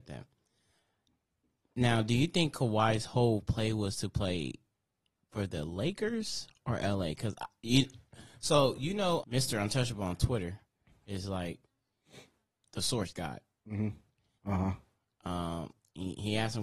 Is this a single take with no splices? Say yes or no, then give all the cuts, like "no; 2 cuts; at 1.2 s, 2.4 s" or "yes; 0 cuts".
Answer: no; 2 cuts; at 9.2 s, 14.4 s